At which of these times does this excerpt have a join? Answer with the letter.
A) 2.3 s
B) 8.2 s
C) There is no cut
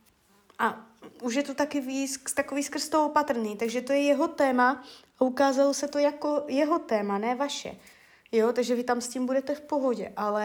C